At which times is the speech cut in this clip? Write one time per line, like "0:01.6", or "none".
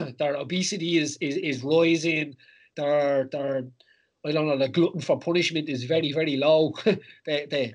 none